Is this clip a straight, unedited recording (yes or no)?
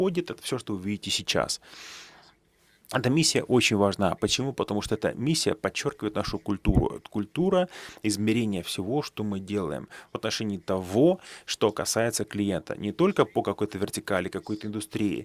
yes